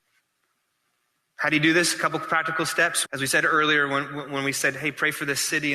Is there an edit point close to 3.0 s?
yes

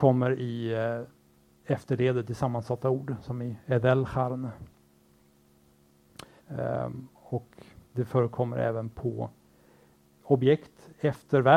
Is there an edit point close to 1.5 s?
no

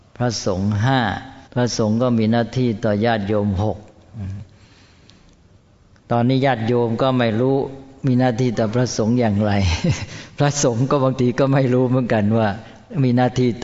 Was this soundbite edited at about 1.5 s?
yes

